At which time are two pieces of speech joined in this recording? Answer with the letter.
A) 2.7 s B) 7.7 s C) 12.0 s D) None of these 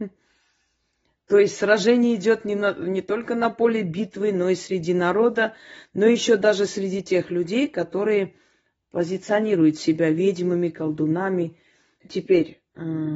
C